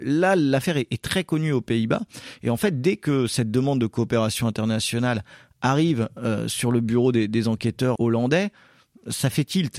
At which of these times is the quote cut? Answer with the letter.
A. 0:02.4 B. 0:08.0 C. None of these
B